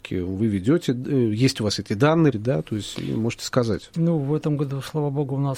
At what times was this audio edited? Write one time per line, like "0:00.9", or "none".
0:02.3
0:03.9